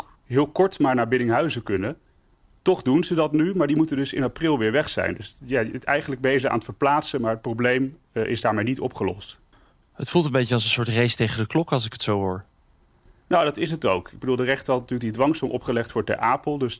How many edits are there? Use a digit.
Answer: 0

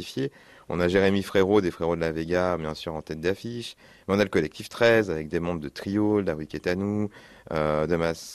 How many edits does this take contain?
0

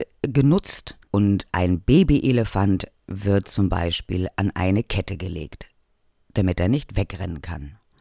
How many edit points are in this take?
1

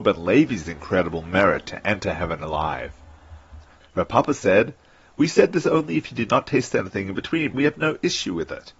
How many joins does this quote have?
2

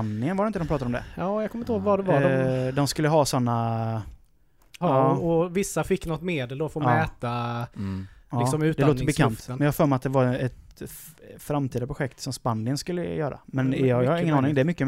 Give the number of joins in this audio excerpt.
1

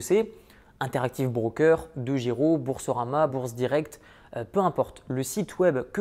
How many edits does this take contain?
0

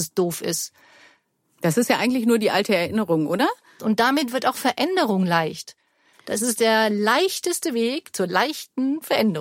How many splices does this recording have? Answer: 1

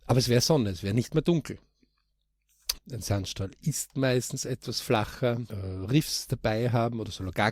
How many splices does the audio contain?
2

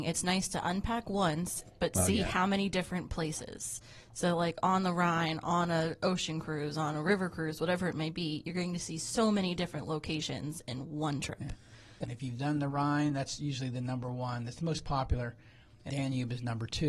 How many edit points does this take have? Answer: 2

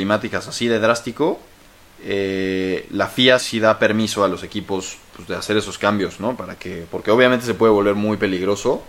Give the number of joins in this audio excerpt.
1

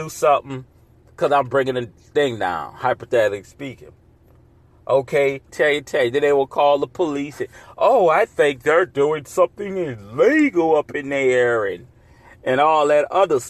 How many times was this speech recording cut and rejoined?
1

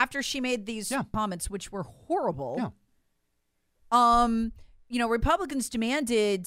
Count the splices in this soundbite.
1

